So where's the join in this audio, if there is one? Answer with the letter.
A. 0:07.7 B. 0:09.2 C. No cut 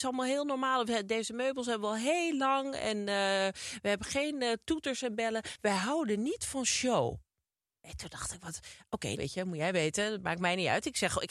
B